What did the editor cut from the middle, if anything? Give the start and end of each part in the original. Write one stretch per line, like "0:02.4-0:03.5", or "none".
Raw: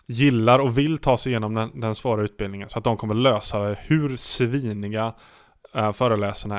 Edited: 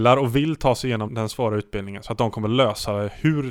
0:01.5-0:01.7